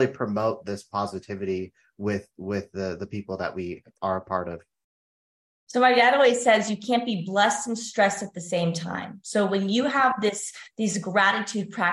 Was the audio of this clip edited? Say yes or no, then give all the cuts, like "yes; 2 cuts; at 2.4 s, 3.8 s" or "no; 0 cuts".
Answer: yes; 1 cut; at 3.9 s